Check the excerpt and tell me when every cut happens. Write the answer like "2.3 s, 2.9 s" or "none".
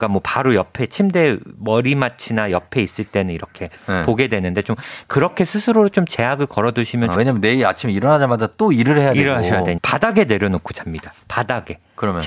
7.1 s, 9.8 s, 11.2 s

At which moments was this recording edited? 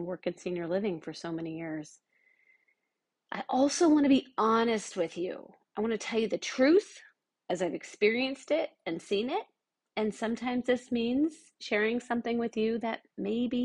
none

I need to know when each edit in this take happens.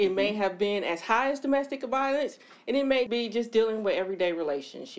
3.1 s

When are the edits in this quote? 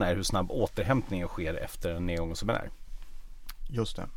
none

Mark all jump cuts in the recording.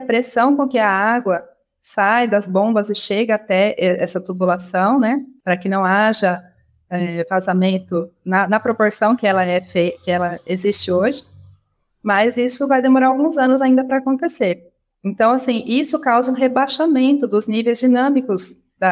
none

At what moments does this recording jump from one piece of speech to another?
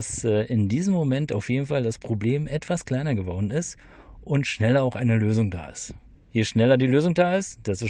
6.2 s

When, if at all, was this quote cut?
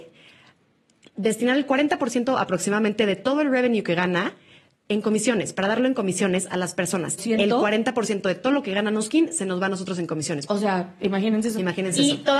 7.2 s, 10.5 s

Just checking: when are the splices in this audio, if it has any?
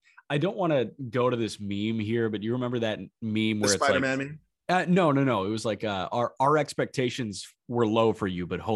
none

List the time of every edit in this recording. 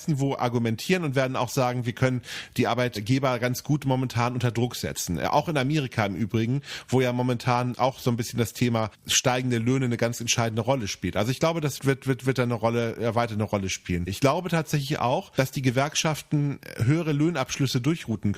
11.8 s, 14.1 s

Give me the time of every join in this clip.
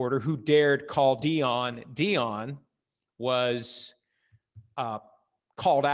none

